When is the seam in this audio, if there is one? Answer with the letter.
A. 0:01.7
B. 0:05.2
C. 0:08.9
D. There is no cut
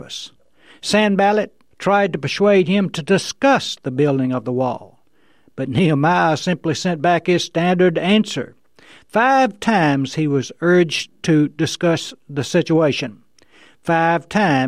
A